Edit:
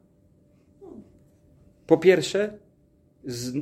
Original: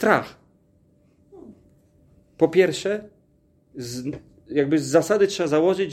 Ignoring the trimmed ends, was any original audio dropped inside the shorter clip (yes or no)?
no